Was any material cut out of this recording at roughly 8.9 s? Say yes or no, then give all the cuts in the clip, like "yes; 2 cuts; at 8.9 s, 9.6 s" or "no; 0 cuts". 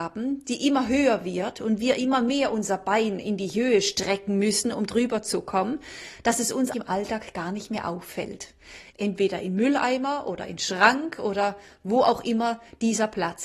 yes; 2 cuts; at 6.7 s, 8.9 s